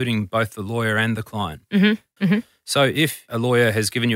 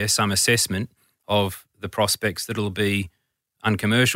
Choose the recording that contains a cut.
first; 1 cut; at 2.2 s

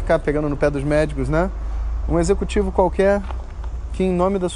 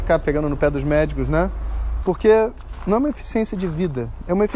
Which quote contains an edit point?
second; 1 cut; at 2.0 s

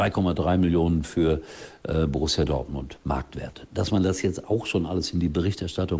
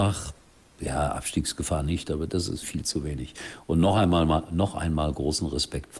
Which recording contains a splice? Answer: second; 1 cut; at 2.6 s

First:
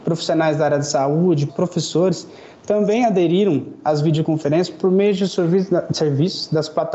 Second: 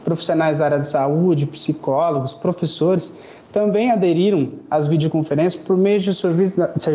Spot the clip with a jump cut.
first; 1 cut; at 1.5 s

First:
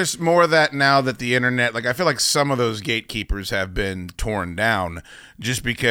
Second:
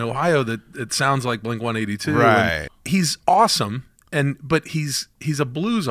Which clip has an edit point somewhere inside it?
second; 1 cut; at 2.7 s

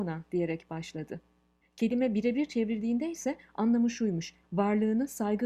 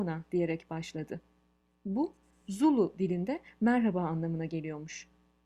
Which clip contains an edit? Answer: first; 2 cuts; at 1.6 s, 4.4 s

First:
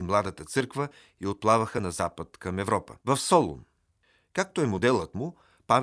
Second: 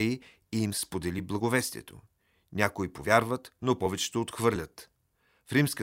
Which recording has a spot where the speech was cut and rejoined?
first; 1 cut; at 3.0 s

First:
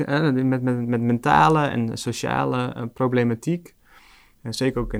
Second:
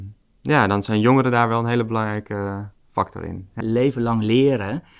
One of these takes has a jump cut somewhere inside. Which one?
second; 1 cut; at 3.6 s

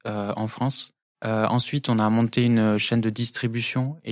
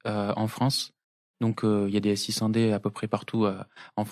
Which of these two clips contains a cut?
first; 1 cut; at 1.0 s

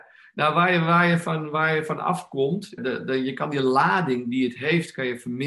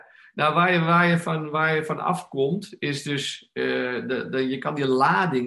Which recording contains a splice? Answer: first; 1 cut; at 2.8 s

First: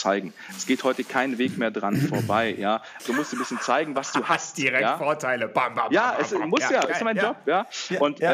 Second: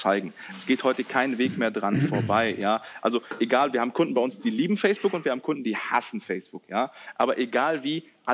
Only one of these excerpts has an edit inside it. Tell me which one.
first; 1 cut; at 3.0 s

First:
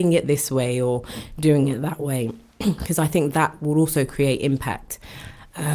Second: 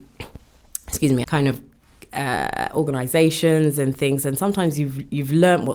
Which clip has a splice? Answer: second; 1 cut; at 1.2 s

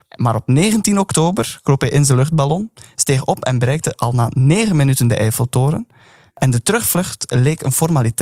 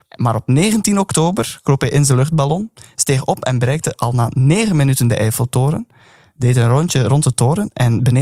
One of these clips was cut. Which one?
first; 1 cut; at 6.3 s

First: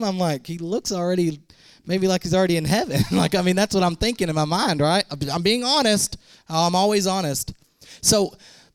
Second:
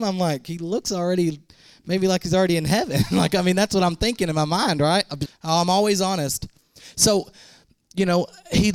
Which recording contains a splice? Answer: second; 1 cut; at 5.3 s

